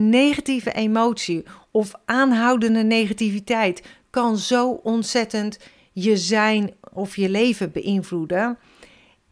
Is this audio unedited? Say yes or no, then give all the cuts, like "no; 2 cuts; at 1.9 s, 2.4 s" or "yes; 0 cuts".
yes; 0 cuts